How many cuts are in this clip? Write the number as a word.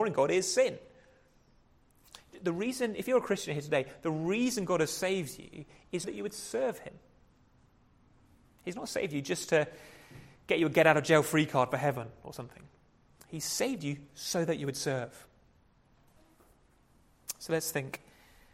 one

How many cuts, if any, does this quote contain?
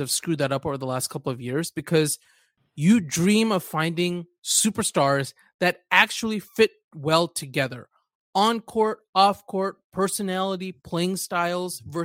zero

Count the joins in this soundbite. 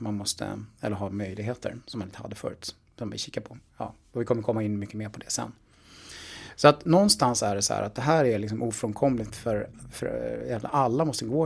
one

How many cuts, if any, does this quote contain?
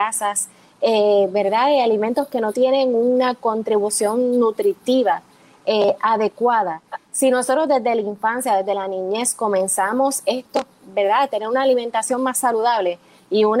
zero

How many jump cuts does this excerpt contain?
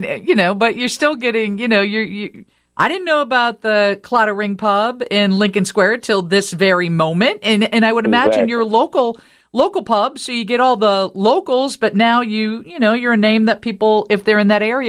zero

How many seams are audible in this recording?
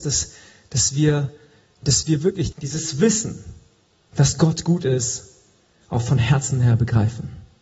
one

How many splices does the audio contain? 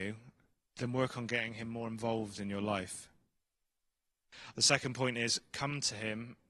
one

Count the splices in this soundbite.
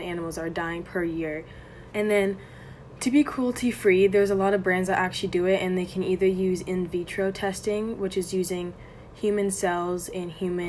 one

